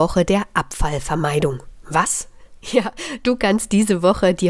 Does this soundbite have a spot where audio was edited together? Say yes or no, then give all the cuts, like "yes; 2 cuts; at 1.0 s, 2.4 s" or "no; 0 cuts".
no; 0 cuts